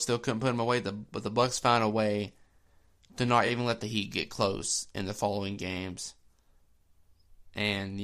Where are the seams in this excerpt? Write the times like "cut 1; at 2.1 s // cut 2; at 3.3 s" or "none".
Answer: none